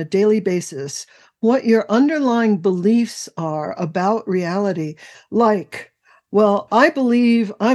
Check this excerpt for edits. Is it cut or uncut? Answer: cut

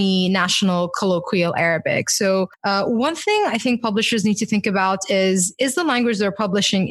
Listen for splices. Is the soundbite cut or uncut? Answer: uncut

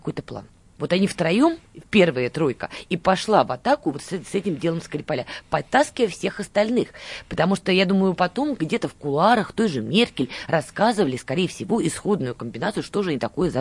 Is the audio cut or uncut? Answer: uncut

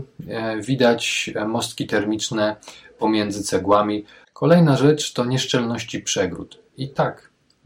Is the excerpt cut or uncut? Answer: cut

